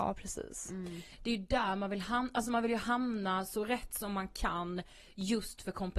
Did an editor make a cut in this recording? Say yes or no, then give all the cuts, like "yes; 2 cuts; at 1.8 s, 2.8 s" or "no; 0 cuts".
no; 0 cuts